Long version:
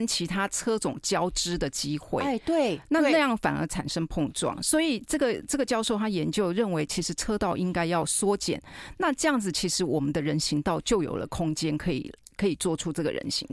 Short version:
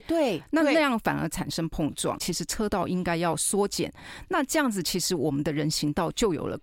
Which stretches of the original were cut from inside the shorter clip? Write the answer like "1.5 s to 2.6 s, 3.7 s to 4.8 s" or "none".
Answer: 4.6 s to 6.9 s